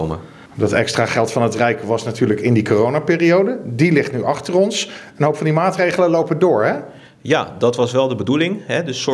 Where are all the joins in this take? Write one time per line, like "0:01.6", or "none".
none

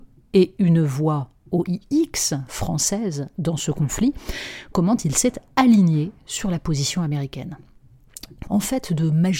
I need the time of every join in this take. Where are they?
0:08.4

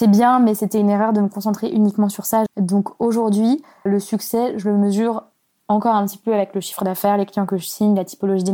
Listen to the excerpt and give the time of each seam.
0:02.5
0:03.9

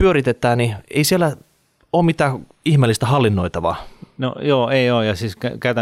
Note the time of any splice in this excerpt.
none

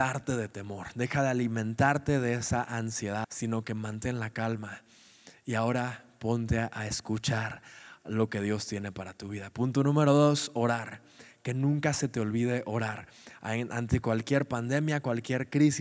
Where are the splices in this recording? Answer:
0:03.2

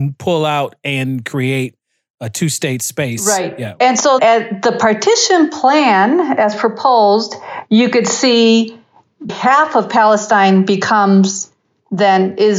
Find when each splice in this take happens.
0:04.2
0:09.3

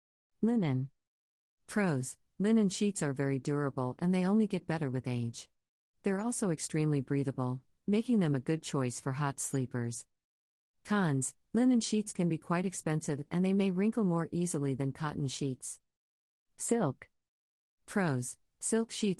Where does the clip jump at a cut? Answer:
none

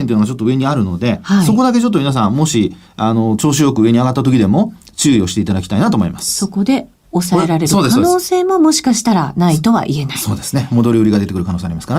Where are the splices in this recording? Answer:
none

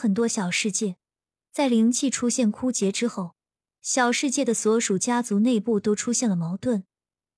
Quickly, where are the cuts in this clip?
none

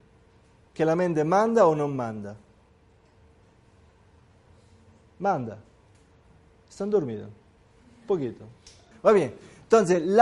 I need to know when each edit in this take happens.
0:08.9

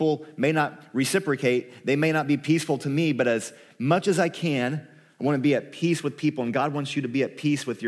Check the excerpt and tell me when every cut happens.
none

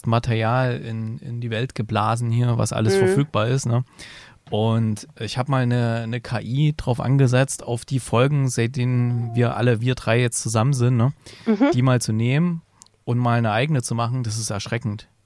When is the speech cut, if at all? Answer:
none

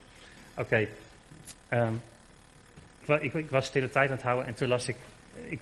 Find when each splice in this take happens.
0:03.0

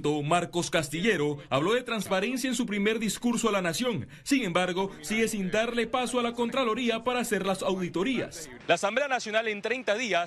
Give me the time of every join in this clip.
none

